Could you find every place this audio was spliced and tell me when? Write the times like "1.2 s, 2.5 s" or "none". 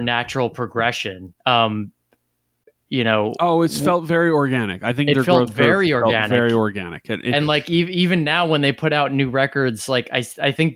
1.4 s